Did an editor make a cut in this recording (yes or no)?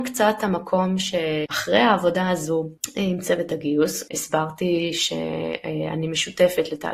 yes